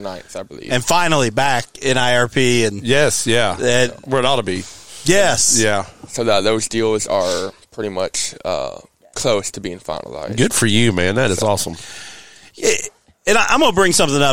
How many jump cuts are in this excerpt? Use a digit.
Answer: 0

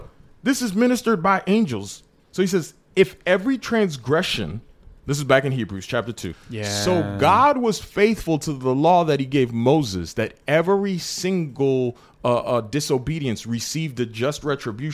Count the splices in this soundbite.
1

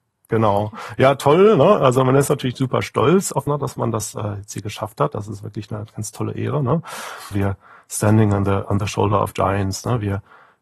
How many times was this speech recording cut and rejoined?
2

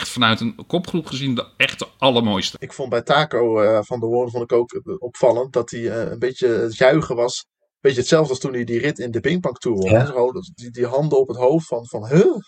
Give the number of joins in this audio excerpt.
0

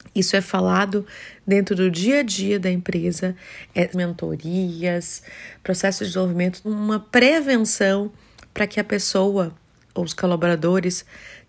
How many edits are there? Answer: 2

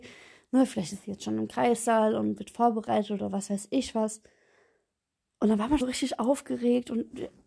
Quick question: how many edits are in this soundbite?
1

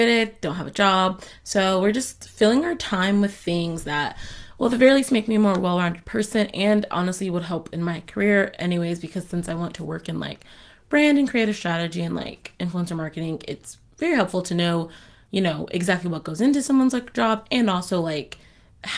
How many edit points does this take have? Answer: 0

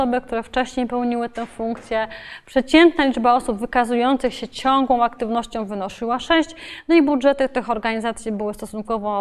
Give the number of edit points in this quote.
0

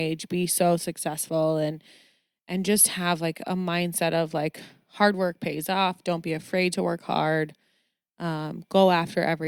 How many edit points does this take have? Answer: 0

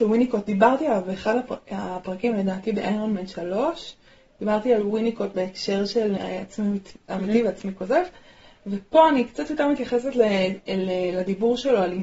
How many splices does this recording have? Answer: 1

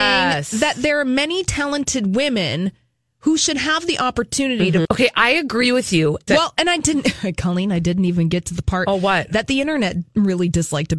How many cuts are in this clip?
2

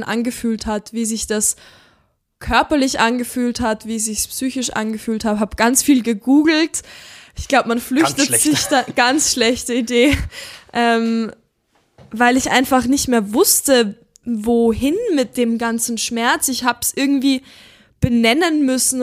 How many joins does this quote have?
0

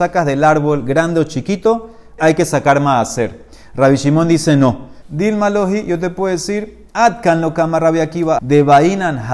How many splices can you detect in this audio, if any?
3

